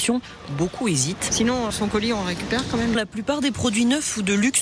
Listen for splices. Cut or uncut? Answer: cut